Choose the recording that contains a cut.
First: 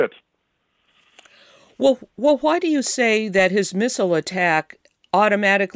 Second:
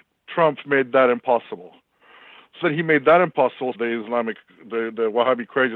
second; 2 cuts; at 2.6 s, 3.7 s

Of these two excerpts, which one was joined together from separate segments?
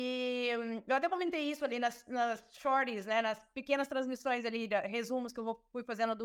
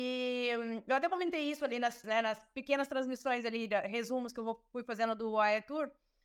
second; 1 cut; at 2.0 s

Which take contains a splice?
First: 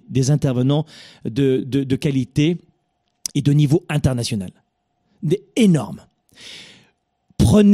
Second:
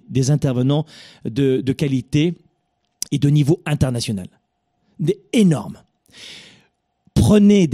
second; 1 cut; at 1.6 s

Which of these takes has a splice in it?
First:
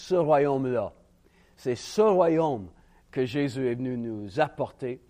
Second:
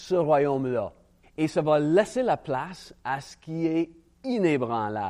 second; 1 cut; at 1.2 s

